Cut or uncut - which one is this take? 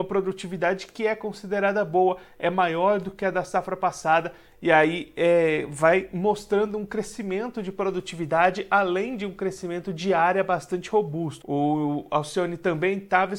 cut